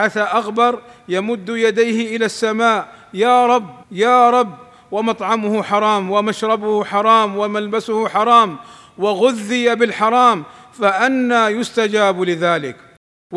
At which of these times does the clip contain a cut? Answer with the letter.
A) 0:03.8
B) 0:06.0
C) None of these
A